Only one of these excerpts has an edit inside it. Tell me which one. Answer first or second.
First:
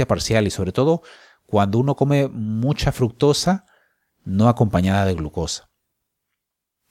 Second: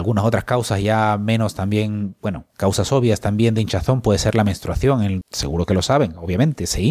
second